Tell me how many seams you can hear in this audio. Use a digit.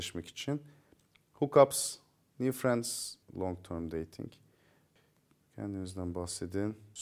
1